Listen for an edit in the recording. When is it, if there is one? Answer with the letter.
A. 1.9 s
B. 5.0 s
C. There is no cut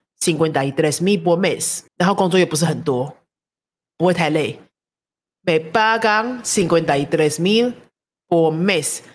A